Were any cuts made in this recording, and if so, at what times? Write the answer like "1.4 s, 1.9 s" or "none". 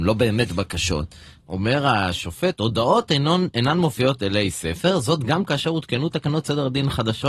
1.4 s